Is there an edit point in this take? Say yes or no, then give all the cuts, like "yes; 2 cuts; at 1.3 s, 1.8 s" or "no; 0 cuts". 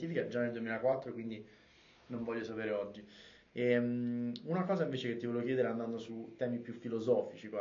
no; 0 cuts